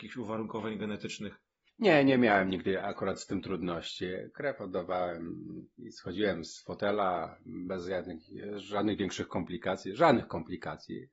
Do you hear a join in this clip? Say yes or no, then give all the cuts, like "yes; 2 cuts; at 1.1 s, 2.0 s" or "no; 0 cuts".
no; 0 cuts